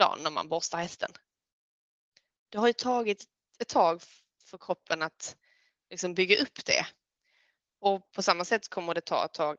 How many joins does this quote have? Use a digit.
1